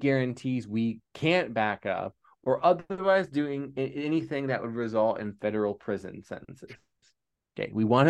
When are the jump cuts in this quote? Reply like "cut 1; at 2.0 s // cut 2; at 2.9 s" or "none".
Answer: none